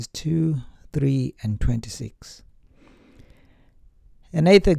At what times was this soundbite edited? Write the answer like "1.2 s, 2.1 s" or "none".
none